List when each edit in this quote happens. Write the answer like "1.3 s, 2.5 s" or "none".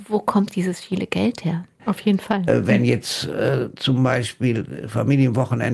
1.8 s